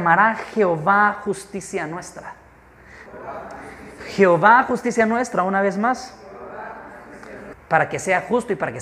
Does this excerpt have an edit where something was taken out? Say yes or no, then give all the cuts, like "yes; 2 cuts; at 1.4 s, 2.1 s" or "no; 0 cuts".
yes; 2 cuts; at 3.1 s, 7.5 s